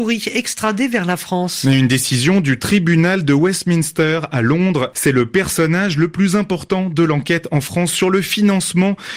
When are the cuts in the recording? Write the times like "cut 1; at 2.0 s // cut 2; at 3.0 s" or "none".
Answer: cut 1; at 4.9 s